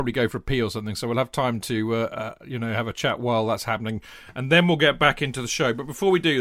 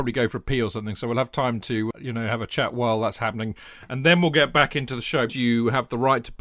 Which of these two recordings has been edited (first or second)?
second